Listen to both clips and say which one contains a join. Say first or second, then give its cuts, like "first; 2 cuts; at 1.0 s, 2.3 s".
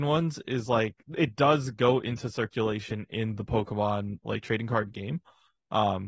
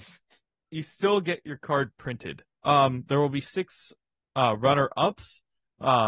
second; 1 cut; at 2.5 s